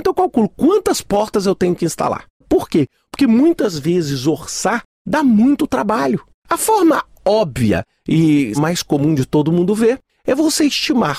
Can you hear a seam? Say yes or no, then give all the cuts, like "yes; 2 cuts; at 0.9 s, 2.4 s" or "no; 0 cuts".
yes; 3 cuts; at 2.4 s, 6.4 s, 8.5 s